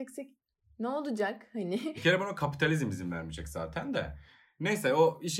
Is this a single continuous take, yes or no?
yes